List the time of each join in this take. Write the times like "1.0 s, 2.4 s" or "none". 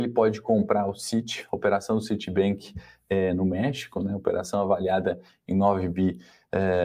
none